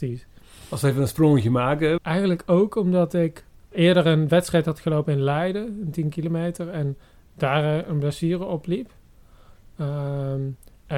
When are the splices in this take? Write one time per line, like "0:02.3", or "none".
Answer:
0:02.0
0:03.7